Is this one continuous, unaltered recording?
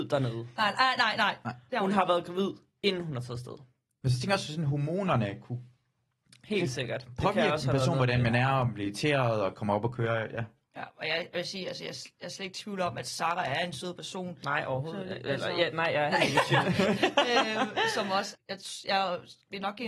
no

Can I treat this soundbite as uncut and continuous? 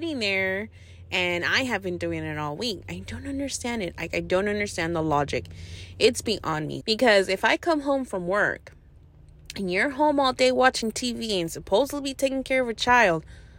no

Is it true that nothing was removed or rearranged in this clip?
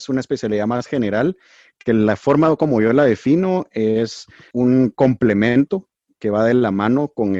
yes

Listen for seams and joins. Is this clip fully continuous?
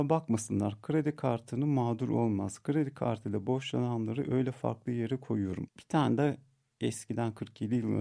no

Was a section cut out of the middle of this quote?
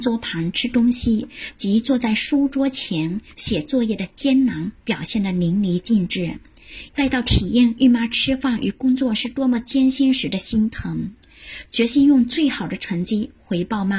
yes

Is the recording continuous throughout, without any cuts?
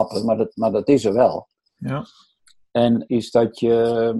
no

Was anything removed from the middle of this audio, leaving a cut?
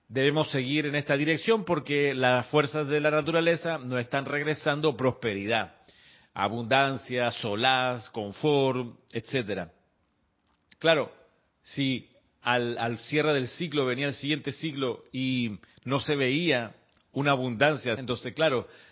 yes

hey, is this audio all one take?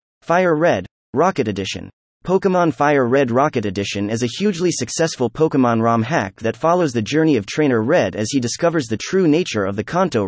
yes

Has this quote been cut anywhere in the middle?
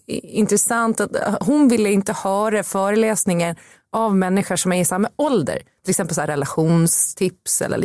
yes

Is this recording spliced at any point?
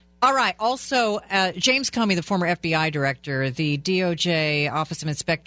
no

